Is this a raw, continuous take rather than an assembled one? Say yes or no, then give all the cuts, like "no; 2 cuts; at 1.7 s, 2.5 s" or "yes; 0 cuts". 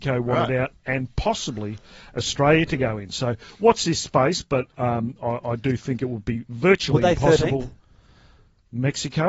yes; 0 cuts